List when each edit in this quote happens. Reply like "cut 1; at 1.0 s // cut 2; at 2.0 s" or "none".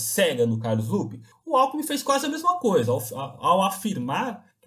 none

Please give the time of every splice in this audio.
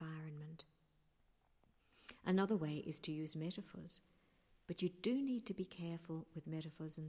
none

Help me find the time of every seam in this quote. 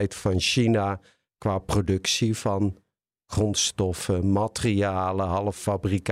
none

